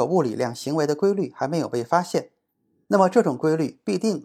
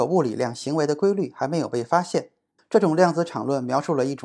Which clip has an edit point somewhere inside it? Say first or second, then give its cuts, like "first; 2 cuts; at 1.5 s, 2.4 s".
second; 1 cut; at 2.6 s